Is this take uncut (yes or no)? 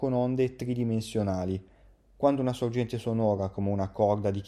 yes